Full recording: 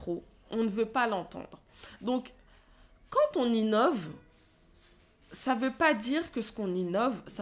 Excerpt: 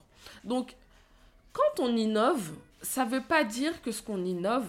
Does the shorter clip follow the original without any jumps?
no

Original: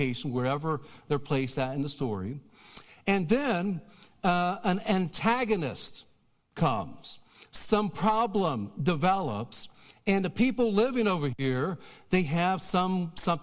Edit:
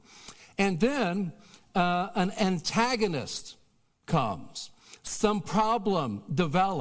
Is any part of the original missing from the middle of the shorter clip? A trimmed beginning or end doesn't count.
no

